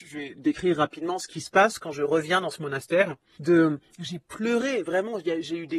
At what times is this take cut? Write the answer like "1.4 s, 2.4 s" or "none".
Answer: 3.3 s